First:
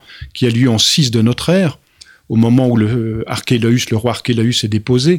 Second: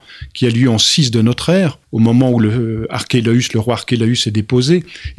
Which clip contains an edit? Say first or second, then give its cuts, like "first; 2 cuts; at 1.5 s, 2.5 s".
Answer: second; 1 cut; at 1.8 s